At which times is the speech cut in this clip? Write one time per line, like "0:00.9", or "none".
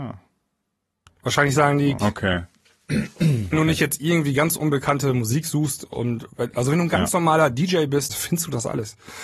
0:02.0
0:03.5
0:08.1